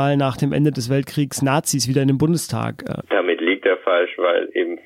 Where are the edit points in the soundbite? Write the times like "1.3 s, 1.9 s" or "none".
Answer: 3.0 s